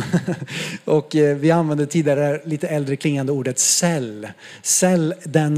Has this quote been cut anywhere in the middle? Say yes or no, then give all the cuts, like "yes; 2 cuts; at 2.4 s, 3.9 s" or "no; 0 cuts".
no; 0 cuts